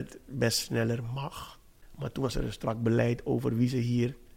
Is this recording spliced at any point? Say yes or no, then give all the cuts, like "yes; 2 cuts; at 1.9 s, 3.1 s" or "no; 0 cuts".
no; 0 cuts